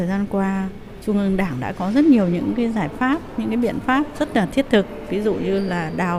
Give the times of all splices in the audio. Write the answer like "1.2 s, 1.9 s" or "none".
none